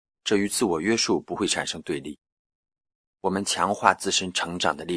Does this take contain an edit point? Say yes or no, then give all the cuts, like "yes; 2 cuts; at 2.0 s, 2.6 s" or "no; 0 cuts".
no; 0 cuts